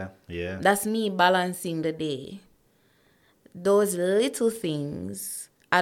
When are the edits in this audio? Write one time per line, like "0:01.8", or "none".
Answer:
none